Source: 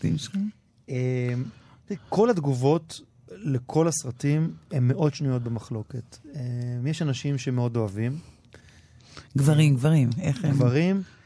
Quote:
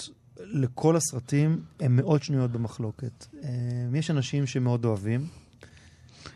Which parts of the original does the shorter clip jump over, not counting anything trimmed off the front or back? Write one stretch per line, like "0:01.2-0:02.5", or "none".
none